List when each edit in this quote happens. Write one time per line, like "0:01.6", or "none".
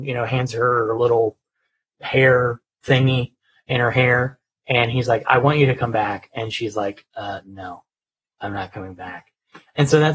none

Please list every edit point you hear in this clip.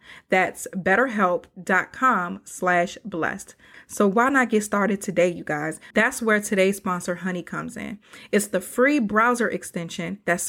0:03.7
0:05.9

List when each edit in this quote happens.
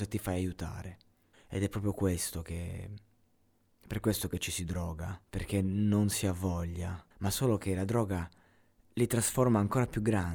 0:01.3
0:05.2
0:07.1

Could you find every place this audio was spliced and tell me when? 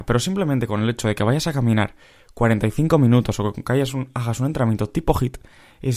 none

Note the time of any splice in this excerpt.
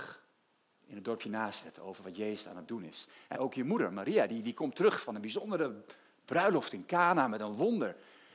0:03.4

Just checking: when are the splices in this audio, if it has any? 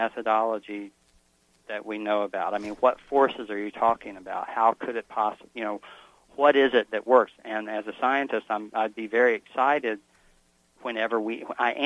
0:07.3

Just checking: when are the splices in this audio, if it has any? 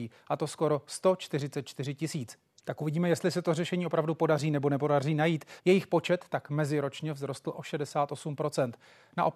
0:02.6
0:05.6

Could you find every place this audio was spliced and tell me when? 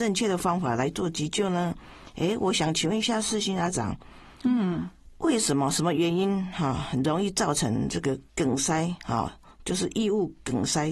0:08.3

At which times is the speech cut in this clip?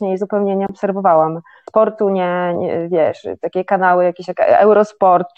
0:02.5

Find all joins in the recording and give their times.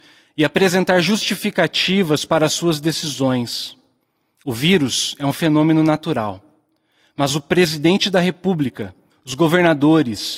0:09.1

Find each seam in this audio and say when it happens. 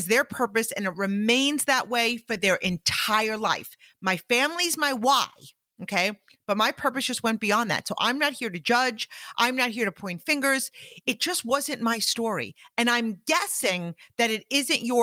none

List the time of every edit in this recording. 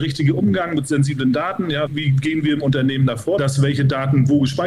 0:01.9
0:03.4

